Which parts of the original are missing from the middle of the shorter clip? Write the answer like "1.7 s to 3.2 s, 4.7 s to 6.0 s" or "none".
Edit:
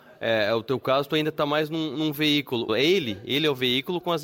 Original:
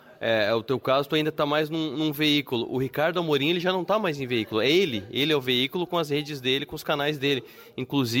2.7 s to 4.5 s